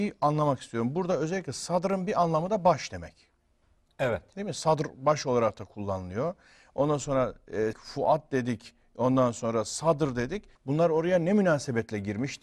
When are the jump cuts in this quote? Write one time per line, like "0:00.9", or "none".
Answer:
0:07.7
0:10.6